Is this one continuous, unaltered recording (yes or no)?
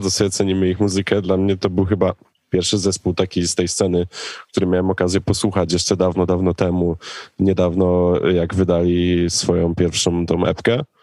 yes